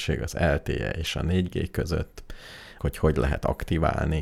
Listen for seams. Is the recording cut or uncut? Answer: cut